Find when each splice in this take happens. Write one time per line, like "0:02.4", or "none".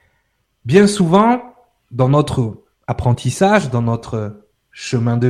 0:02.7

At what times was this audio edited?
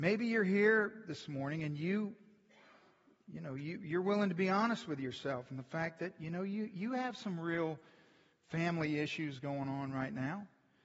none

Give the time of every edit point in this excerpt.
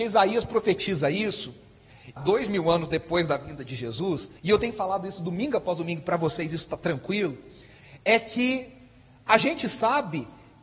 0:02.2
0:04.4

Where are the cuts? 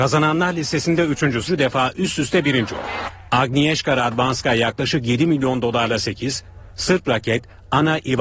0:01.5
0:03.3

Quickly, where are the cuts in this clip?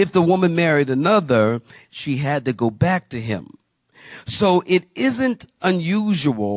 0:01.8

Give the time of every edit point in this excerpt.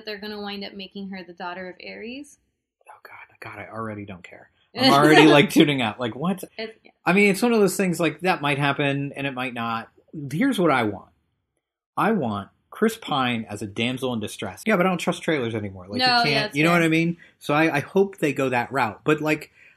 0:06.5
0:14.6

